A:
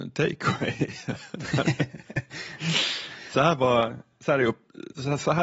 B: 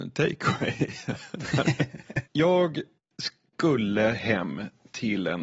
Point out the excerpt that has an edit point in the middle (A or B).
B